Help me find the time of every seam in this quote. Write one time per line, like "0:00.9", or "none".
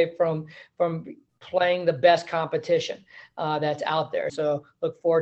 0:04.3